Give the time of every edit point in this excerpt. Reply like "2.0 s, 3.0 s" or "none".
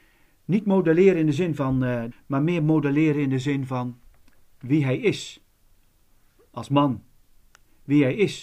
2.1 s